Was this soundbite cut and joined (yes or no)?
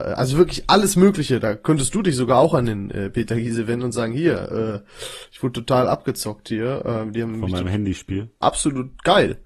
yes